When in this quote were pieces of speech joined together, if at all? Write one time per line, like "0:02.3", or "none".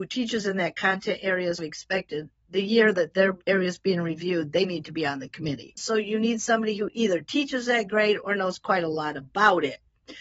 0:03.4
0:05.7